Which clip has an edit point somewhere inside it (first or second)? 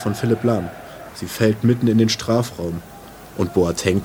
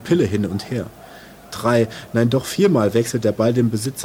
first